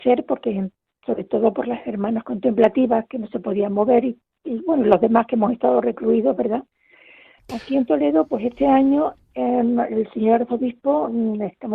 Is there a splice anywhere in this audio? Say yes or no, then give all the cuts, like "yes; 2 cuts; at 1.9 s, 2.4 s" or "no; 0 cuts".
yes; 1 cut; at 7.4 s